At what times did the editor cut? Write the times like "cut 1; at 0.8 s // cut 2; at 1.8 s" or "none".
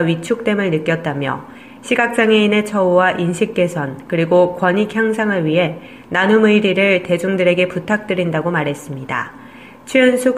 none